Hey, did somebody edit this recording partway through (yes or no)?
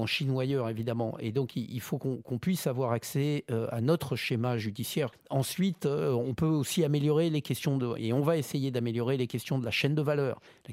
yes